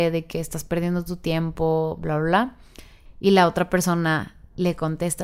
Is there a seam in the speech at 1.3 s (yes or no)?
no